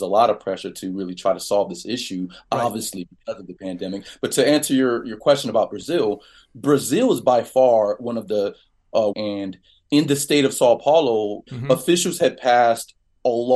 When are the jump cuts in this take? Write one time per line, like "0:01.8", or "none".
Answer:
0:09.1
0:11.5